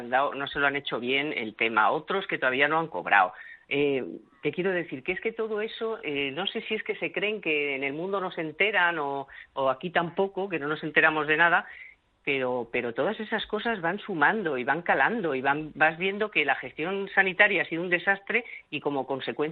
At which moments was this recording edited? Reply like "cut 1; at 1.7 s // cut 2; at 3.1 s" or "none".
none